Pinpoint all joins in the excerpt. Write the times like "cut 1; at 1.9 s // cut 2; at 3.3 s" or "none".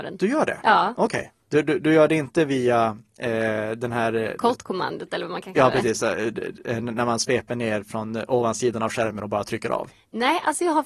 none